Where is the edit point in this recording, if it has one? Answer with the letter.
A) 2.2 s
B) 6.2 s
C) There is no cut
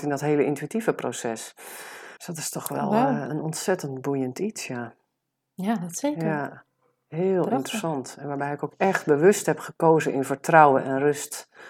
A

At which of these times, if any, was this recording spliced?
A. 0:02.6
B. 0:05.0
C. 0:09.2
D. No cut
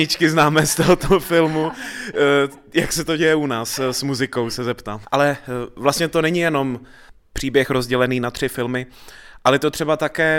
B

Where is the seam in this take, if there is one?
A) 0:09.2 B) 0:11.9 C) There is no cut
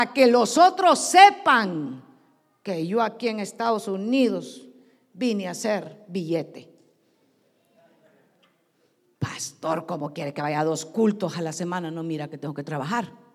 C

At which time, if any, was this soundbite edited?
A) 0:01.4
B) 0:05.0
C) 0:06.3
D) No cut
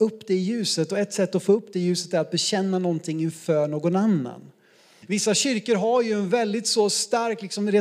B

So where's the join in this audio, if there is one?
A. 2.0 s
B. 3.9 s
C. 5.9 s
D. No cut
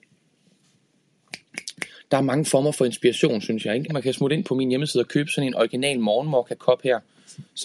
B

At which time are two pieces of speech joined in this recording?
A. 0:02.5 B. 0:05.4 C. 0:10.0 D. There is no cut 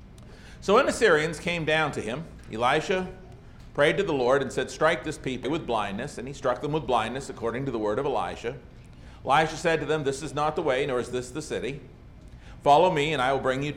B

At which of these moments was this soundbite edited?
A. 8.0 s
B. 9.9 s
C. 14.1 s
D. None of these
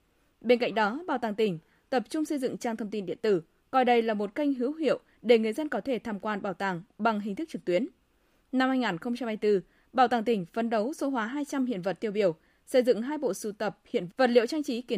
C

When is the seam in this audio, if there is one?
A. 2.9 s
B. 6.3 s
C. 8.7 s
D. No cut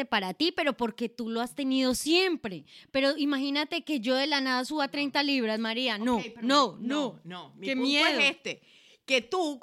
D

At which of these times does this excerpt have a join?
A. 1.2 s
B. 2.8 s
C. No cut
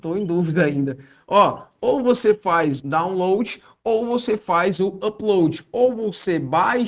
B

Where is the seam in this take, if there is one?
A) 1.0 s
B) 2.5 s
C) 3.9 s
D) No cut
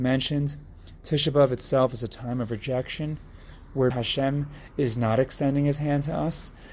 C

